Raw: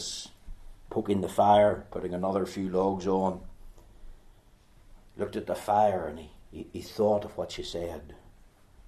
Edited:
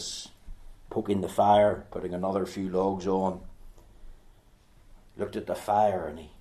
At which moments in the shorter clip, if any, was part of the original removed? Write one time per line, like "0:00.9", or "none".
none